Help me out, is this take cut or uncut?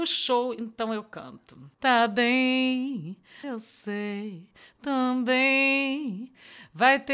cut